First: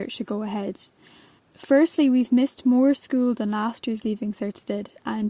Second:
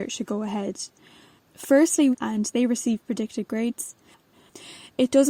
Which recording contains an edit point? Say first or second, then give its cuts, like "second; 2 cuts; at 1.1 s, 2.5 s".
second; 1 cut; at 2.1 s